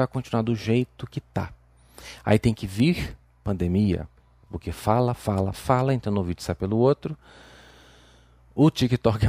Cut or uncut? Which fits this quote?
cut